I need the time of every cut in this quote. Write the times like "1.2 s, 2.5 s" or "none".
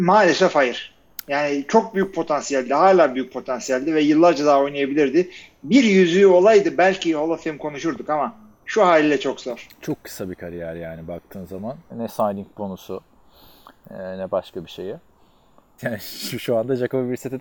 11.9 s, 15.8 s